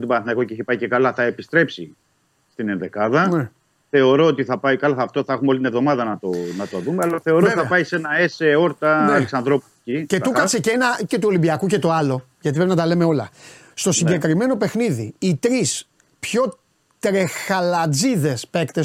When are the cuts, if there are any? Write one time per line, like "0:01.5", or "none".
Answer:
0:11.1

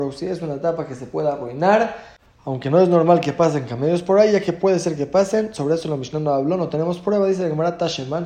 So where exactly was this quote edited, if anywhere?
none

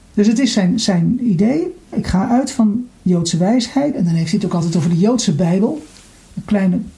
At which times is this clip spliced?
0:01.9
0:03.9

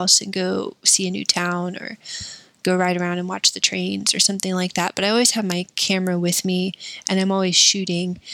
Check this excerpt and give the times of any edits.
none

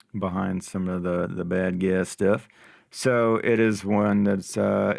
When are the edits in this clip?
none

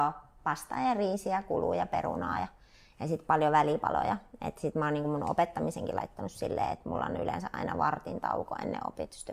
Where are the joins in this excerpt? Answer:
none

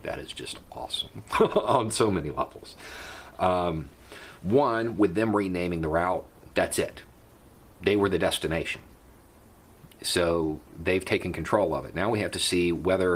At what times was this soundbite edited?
none

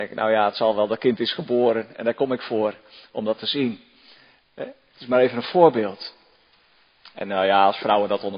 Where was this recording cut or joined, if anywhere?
none

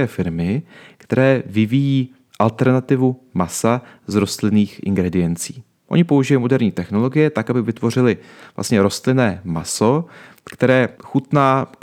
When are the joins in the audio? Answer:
0:10.9

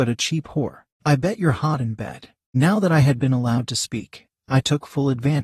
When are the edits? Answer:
0:02.5

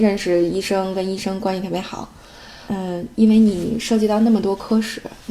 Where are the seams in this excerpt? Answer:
0:02.7

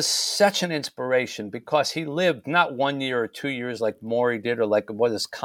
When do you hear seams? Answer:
none

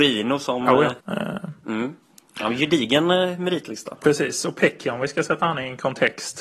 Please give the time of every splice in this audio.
0:01.0
0:04.0

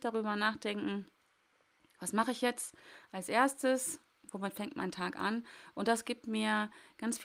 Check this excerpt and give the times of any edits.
none

